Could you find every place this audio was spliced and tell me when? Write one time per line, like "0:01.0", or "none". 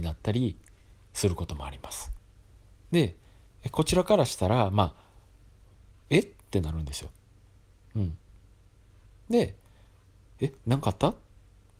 none